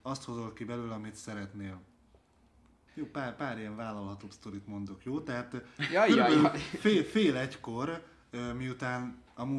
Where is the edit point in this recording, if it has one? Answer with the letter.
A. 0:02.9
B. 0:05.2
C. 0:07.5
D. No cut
A